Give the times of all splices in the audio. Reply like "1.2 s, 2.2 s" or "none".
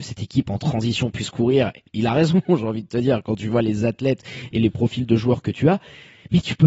none

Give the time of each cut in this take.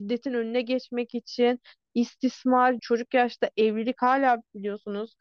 2.8 s

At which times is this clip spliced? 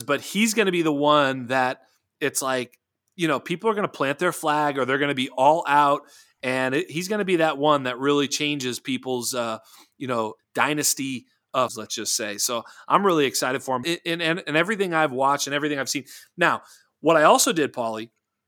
10.4 s, 11.7 s, 13.8 s

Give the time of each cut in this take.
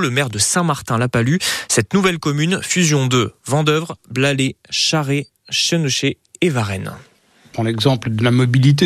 none

